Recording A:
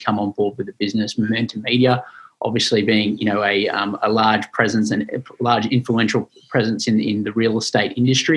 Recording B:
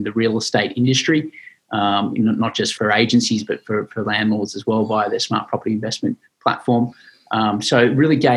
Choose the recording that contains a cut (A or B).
B